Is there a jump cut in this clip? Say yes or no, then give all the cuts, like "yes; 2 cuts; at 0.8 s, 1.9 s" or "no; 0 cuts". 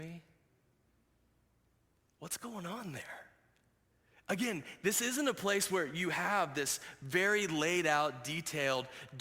no; 0 cuts